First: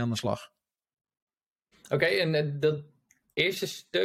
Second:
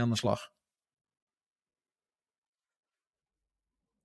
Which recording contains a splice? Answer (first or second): first